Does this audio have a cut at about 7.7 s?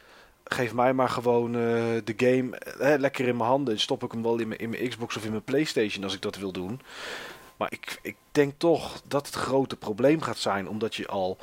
yes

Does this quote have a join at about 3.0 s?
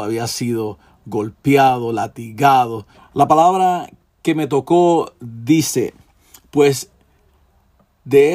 yes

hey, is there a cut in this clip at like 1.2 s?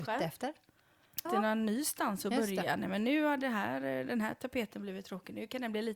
yes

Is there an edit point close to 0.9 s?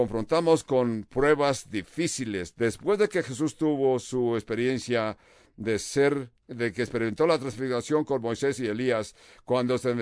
no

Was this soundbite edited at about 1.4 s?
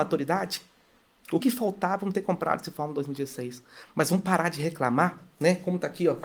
yes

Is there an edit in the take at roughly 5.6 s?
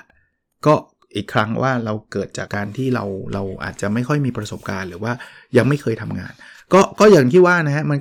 no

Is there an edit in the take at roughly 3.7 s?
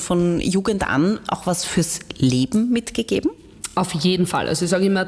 no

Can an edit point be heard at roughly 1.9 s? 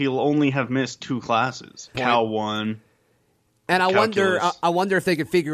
yes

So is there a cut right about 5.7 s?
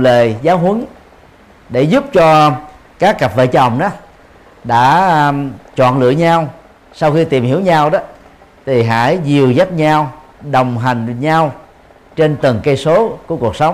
yes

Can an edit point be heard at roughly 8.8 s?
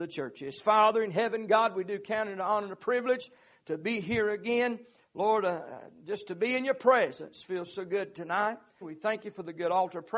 yes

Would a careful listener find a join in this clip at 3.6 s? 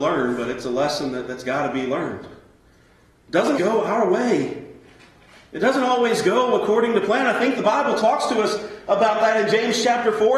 yes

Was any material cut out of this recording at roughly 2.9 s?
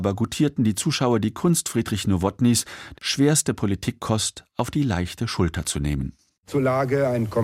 yes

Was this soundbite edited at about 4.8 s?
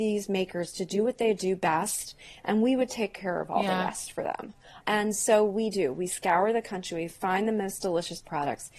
yes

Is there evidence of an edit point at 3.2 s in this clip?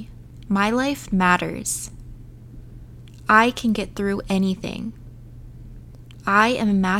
yes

